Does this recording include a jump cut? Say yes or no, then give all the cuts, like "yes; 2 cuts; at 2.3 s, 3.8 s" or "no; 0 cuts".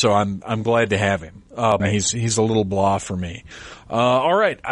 yes; 1 cut; at 1.8 s